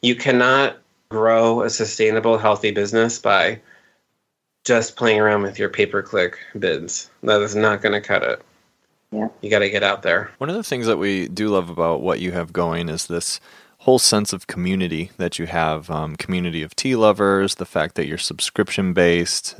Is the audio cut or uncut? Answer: cut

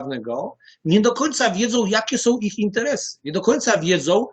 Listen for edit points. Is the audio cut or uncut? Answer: uncut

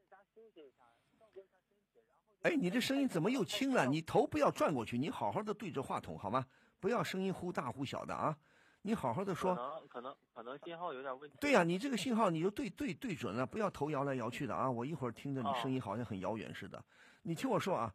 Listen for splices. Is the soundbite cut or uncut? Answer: uncut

